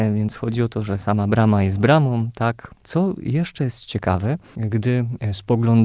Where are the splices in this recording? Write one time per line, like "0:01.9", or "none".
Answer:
0:02.8